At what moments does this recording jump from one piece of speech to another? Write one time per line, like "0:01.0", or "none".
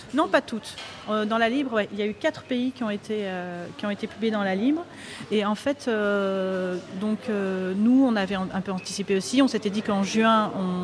none